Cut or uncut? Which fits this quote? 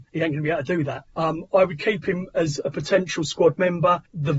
uncut